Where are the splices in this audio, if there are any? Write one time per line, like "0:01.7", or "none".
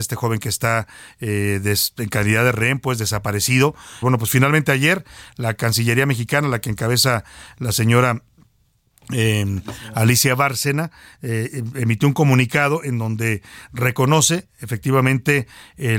0:04.0